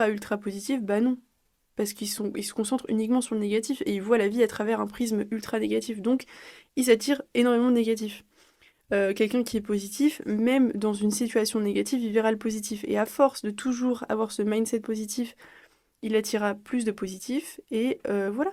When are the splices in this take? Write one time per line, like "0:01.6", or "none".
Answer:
none